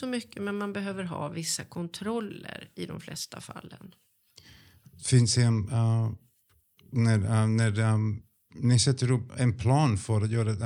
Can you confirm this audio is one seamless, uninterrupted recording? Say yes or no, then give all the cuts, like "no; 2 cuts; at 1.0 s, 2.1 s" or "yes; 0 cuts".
no; 1 cut; at 9.3 s